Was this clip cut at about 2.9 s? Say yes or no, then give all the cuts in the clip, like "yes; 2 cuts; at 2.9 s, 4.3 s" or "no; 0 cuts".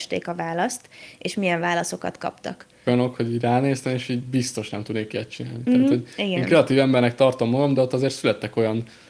yes; 1 cut; at 2.9 s